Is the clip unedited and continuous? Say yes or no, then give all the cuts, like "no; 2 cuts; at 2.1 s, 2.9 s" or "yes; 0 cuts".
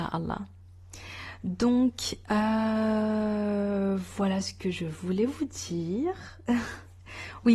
yes; 0 cuts